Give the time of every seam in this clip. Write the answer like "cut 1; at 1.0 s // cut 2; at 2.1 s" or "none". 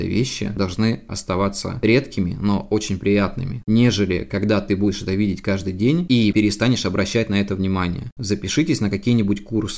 cut 1; at 6.3 s // cut 2; at 8.2 s